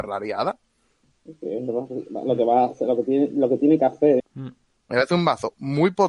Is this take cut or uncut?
cut